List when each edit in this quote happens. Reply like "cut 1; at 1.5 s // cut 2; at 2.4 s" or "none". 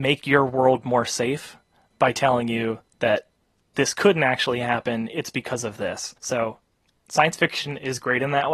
cut 1; at 6.2 s